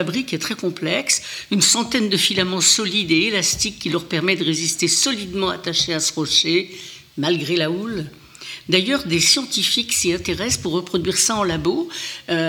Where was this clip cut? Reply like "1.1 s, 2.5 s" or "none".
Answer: none

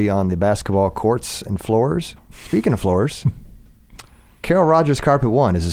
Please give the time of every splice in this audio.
none

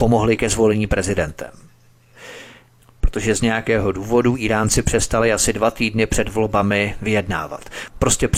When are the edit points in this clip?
2.8 s

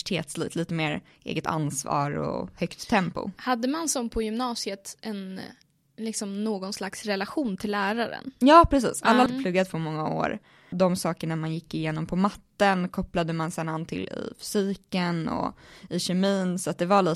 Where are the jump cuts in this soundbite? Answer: 9.3 s, 10.7 s

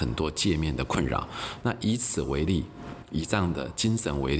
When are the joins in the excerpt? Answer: none

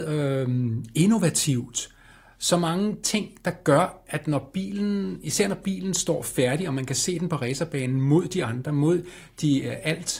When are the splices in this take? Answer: none

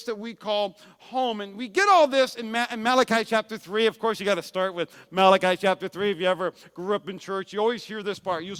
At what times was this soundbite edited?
none

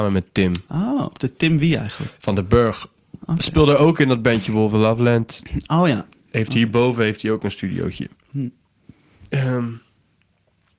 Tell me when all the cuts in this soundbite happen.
1.1 s

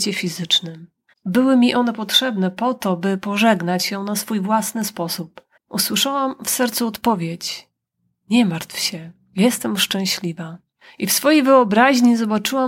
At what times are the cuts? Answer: 1.1 s, 5.6 s

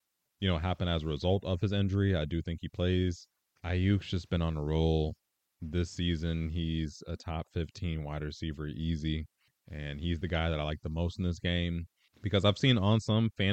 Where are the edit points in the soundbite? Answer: 12.1 s

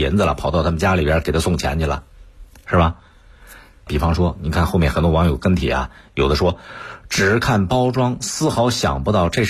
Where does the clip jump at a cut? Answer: 3.9 s

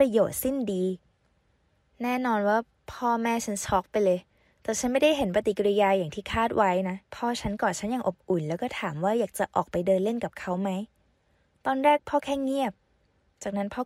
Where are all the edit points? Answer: 7.1 s

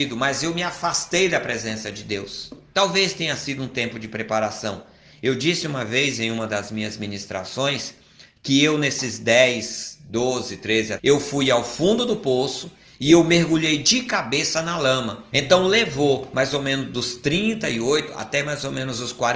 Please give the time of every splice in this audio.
2.7 s, 11.0 s, 15.3 s

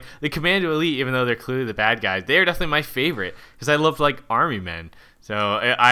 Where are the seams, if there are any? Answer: none

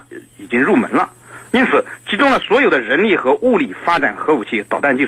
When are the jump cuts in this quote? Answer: 1.5 s

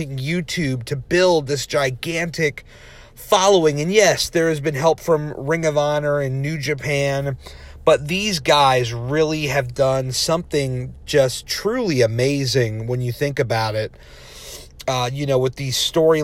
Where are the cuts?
none

